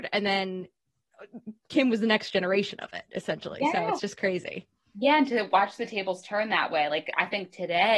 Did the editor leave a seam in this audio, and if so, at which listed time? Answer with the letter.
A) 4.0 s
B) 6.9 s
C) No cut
C